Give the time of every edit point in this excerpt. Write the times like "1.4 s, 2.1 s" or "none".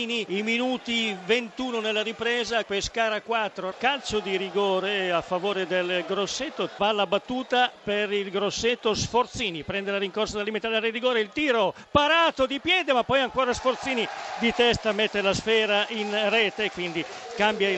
2.6 s